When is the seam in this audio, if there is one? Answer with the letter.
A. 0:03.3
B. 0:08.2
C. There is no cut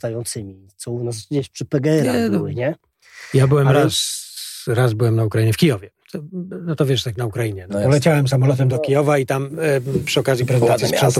C